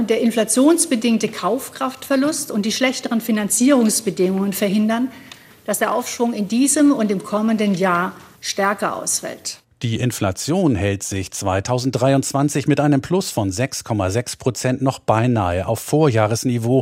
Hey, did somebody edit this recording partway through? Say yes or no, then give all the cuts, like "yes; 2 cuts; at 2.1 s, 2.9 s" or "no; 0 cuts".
no; 0 cuts